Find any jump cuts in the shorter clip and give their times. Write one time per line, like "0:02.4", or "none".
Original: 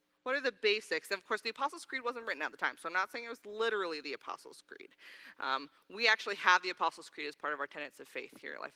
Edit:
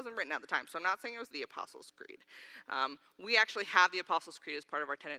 0:01.3